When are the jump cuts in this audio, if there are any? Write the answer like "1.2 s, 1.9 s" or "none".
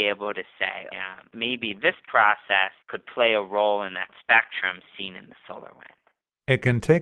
0.9 s, 2.8 s